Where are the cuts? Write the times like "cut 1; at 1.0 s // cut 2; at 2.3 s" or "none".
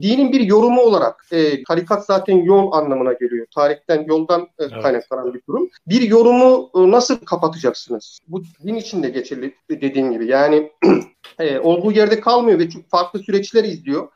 cut 1; at 1.6 s // cut 2; at 8.2 s

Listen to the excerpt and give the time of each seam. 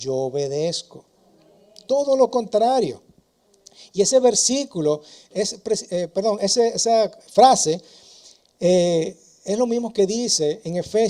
cut 1; at 7.2 s

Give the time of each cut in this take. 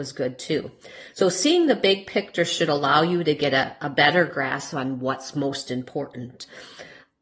none

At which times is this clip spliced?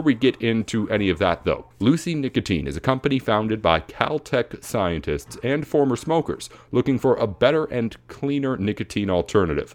cut 1; at 1.7 s

